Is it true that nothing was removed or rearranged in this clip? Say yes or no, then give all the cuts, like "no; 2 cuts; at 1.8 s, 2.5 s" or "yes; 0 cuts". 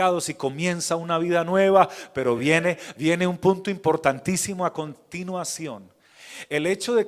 yes; 0 cuts